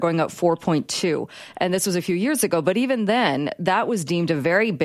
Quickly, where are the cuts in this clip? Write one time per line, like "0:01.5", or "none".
none

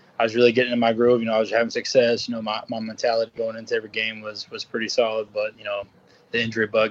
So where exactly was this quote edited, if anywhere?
none

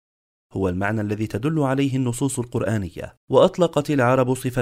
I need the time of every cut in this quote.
0:03.2

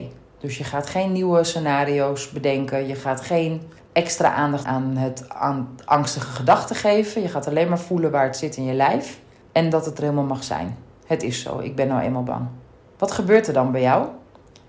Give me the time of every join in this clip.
0:04.6

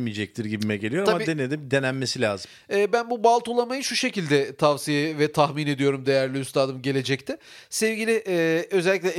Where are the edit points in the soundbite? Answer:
none

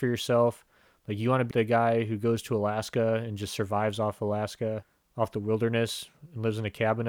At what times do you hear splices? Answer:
0:01.5

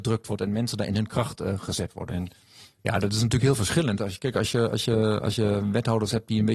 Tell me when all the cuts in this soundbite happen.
0:02.1

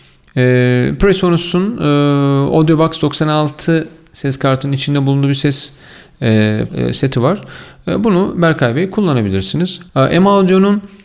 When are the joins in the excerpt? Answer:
0:06.7
0:09.9

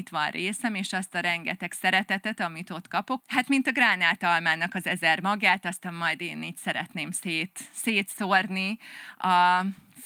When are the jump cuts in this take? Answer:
0:03.2

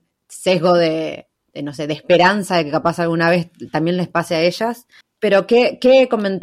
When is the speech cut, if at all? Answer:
0:05.0

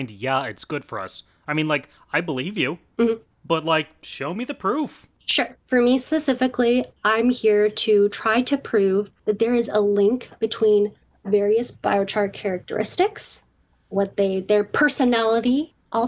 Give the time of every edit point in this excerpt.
0:09.2

